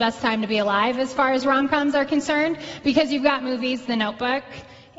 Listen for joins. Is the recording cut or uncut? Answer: cut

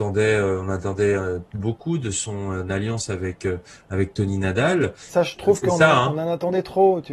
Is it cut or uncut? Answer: cut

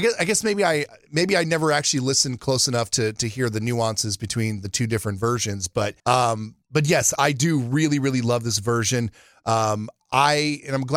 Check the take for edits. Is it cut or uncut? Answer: cut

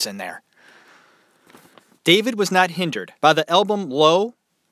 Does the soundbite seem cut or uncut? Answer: cut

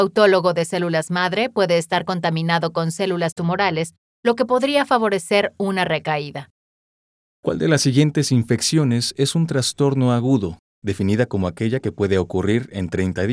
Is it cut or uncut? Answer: uncut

